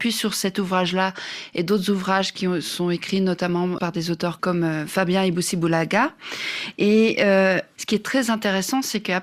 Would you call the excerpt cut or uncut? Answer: cut